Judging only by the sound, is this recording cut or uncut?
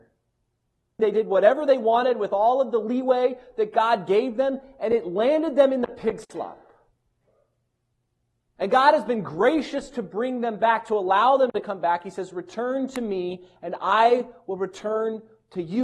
cut